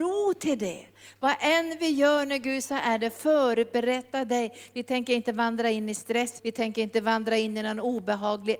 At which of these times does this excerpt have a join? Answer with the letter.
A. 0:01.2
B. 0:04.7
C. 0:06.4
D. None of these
C